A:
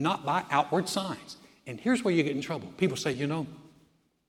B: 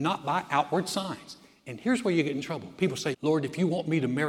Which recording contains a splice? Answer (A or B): B